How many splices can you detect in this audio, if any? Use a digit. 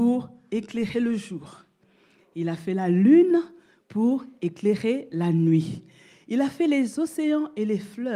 0